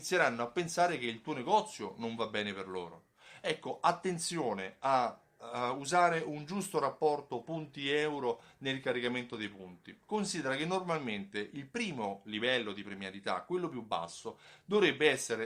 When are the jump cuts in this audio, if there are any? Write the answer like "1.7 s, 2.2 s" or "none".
none